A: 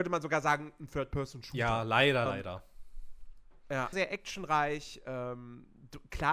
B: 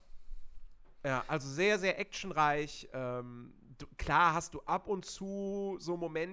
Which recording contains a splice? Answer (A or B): A